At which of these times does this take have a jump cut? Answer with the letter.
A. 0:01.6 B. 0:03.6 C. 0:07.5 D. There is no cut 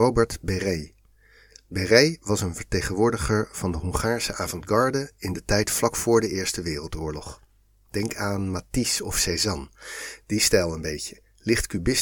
D